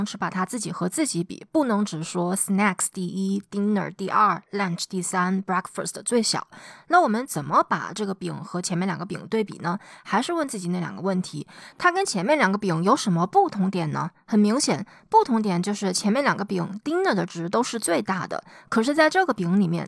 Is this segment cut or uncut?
uncut